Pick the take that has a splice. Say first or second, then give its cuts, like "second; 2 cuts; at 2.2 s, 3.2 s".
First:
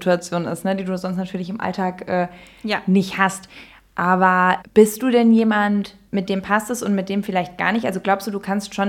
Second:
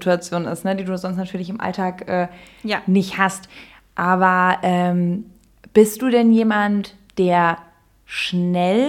first; 2 cuts; at 4.6 s, 6.1 s